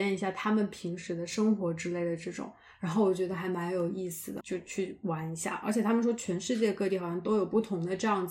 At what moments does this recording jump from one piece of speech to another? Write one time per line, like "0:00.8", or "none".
0:04.4

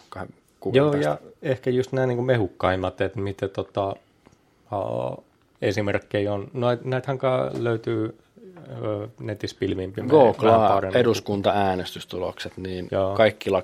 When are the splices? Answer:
none

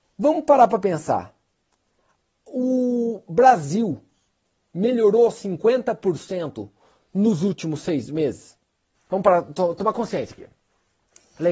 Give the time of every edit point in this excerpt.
0:09.0

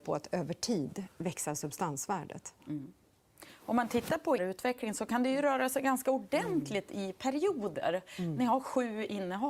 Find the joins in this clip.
0:04.4

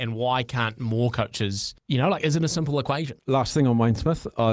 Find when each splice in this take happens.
0:01.8
0:03.2

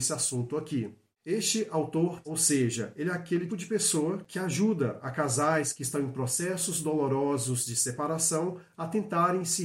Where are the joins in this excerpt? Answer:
0:02.2
0:03.5

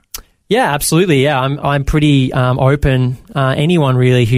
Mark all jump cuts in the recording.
0:01.6

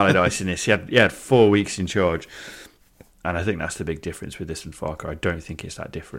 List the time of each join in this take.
0:03.1

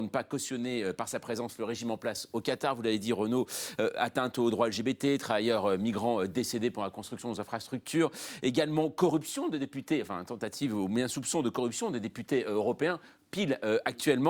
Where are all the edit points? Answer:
none

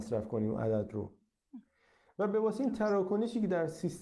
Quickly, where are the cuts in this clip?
none

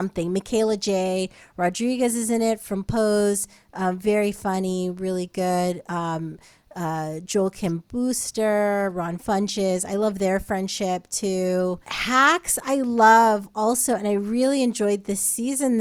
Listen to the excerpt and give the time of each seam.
0:11.8

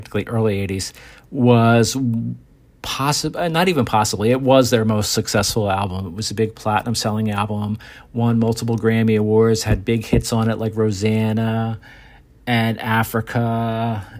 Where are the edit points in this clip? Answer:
none

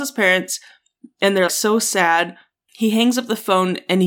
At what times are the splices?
0:01.5

